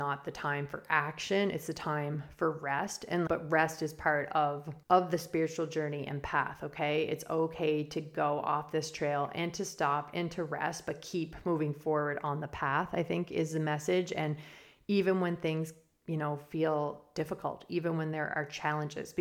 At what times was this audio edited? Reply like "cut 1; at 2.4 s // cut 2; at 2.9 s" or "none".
cut 1; at 3.3 s // cut 2; at 4.8 s